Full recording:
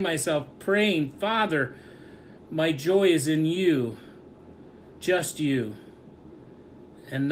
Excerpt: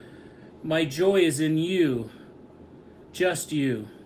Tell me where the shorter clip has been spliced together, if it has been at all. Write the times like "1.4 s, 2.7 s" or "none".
none